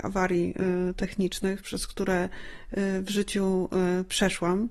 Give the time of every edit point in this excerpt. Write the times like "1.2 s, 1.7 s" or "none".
none